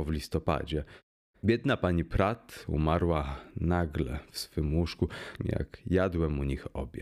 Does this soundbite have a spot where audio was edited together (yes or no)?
yes